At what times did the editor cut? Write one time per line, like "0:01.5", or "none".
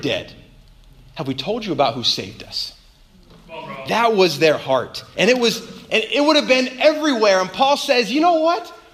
0:05.1